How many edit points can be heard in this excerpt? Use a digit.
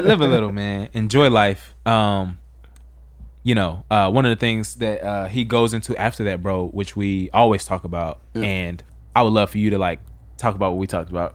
0